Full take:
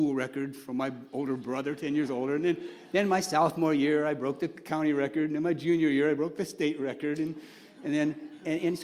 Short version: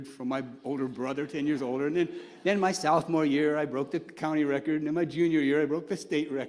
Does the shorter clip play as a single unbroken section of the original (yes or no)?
yes